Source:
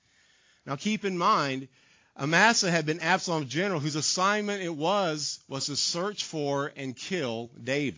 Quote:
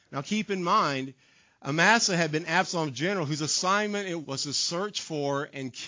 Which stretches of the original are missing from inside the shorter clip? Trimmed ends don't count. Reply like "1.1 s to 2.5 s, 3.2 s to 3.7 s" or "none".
4.8 s to 5.4 s